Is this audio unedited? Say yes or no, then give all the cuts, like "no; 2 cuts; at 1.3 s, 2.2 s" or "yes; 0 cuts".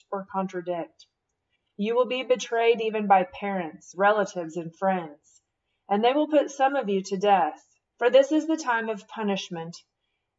no; 2 cuts; at 3.9 s, 7.9 s